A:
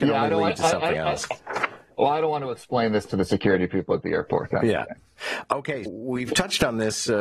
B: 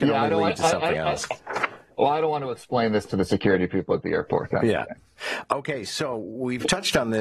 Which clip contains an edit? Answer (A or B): A